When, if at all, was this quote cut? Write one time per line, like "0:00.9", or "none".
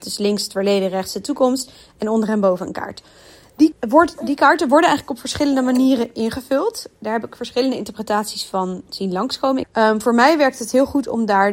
0:03.7
0:09.6